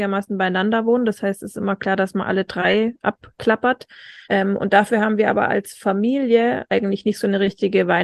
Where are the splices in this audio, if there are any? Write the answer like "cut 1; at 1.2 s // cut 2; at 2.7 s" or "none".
cut 1; at 4.2 s // cut 2; at 6.7 s